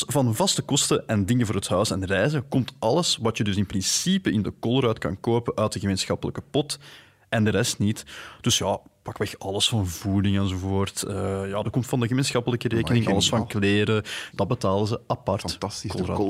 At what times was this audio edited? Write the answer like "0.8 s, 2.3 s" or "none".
14.3 s